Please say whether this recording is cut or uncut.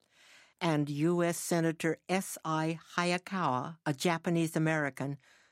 uncut